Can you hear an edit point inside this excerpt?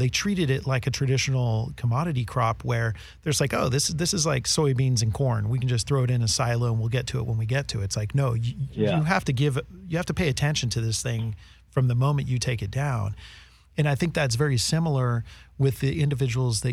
no; 0 cuts

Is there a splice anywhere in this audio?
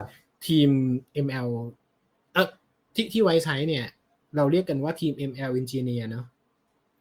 no; 0 cuts

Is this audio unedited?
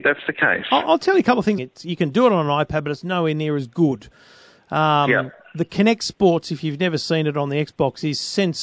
no; 1 cut; at 1.6 s

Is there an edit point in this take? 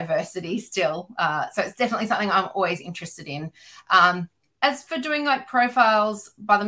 no; 0 cuts

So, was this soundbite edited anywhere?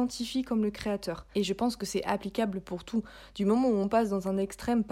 yes; 1 cut; at 1.3 s

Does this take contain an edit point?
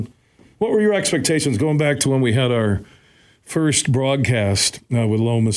no; 0 cuts

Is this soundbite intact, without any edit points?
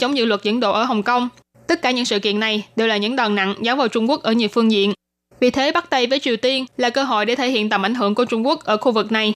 yes; 0 cuts

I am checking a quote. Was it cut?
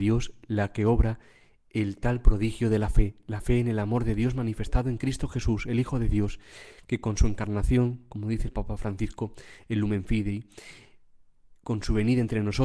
no; 0 cuts

